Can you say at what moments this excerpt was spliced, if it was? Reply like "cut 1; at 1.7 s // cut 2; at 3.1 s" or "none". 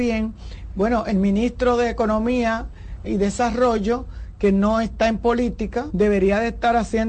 cut 1; at 3.0 s // cut 2; at 5.9 s